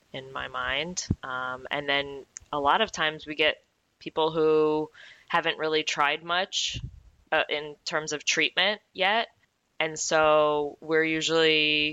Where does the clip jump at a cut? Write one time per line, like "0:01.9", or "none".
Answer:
none